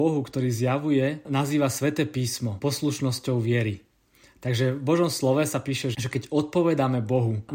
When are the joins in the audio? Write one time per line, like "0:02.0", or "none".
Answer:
0:05.9